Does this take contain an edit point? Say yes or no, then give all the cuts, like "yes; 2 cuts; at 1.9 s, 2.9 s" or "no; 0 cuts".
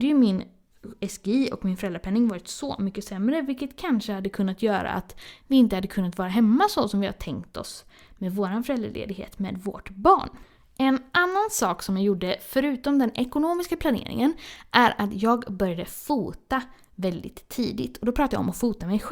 no; 0 cuts